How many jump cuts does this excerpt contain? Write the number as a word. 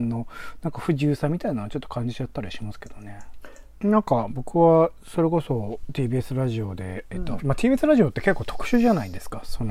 two